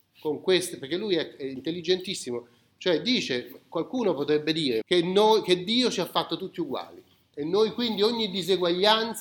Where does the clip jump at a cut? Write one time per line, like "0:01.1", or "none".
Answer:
0:04.8